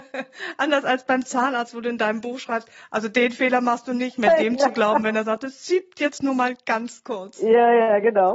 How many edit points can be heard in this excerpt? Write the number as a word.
zero